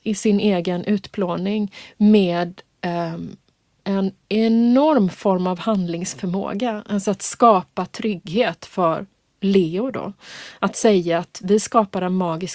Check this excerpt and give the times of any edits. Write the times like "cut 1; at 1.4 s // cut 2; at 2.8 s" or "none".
none

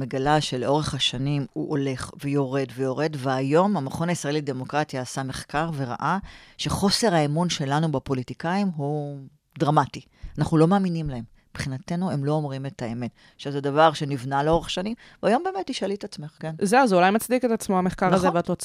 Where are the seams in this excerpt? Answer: none

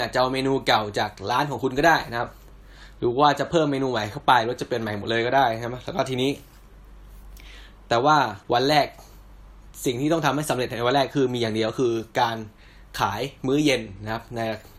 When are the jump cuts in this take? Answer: cut 1; at 8.4 s

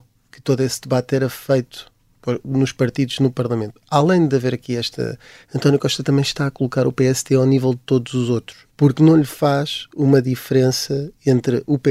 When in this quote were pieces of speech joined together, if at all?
cut 1; at 5.4 s // cut 2; at 8.7 s

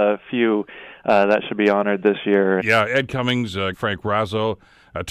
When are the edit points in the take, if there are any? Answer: cut 1; at 2.6 s // cut 2; at 3.7 s

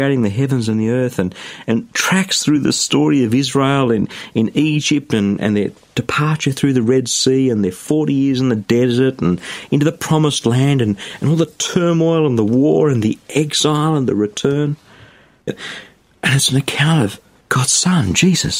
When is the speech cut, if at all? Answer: cut 1; at 15.5 s

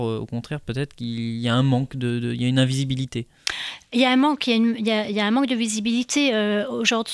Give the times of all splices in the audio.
none

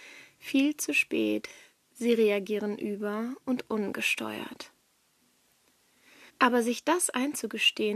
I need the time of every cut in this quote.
cut 1; at 6.3 s

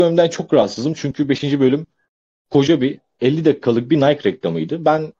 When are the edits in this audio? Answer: none

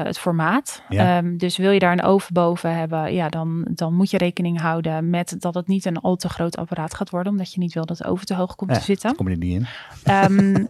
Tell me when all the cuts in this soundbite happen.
none

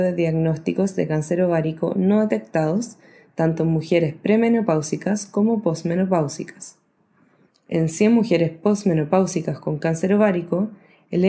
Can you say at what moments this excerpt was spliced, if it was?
cut 1; at 7.5 s

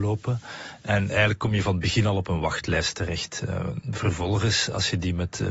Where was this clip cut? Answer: cut 1; at 3.8 s

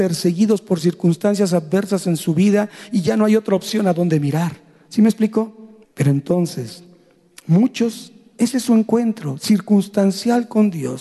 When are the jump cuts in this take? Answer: cut 1; at 5.8 s

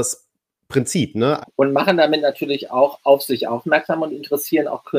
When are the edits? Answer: cut 1; at 1.4 s

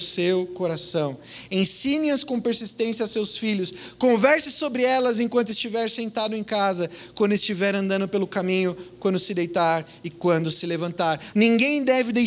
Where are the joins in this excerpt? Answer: cut 1; at 11.3 s

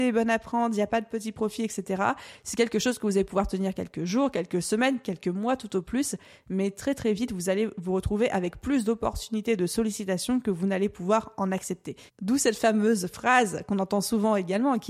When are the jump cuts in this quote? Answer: cut 1; at 12.1 s

